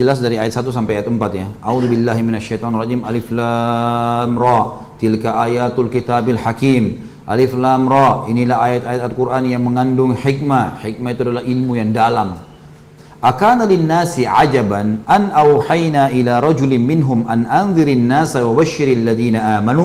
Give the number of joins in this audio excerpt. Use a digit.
1